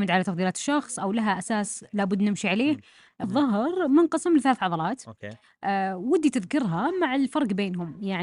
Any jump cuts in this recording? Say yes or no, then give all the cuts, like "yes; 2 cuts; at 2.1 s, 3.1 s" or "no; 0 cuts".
yes; 1 cut; at 3.2 s